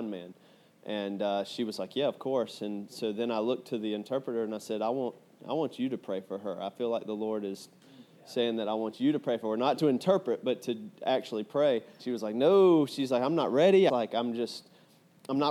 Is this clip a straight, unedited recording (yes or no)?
no